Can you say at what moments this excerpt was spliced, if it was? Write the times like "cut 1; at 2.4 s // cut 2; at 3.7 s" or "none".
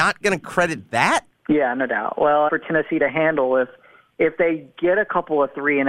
cut 1; at 1.3 s // cut 2; at 2.5 s